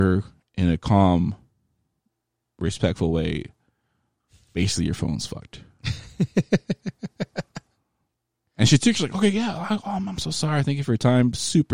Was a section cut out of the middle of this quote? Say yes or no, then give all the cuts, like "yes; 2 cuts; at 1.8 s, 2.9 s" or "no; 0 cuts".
no; 0 cuts